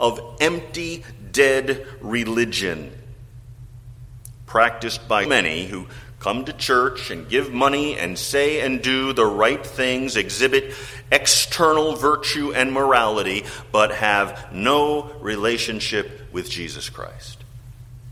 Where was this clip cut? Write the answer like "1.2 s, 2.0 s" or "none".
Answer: 5.3 s